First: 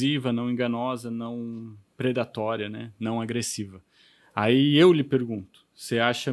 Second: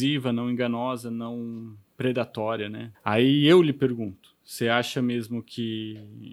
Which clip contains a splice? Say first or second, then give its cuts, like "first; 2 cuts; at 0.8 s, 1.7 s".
second; 1 cut; at 2.9 s